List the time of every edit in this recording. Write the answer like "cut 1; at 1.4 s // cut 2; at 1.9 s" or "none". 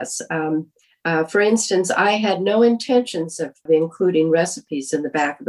none